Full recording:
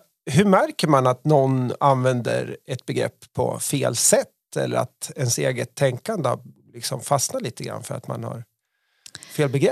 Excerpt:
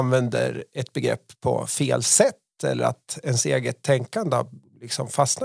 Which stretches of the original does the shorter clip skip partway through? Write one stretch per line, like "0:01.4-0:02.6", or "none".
none